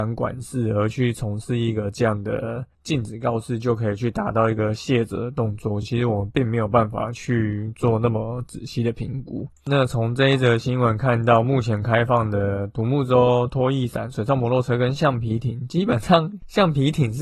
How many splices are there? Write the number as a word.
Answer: zero